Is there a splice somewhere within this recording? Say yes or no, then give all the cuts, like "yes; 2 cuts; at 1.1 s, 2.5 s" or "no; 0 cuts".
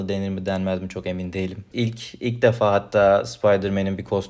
yes; 1 cut; at 1.7 s